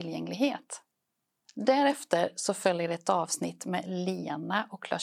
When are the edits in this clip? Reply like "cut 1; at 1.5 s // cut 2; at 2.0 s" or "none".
cut 1; at 1.5 s